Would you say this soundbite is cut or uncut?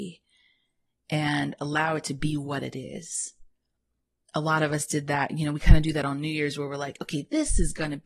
uncut